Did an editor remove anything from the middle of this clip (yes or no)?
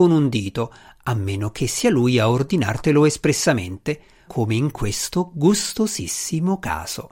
yes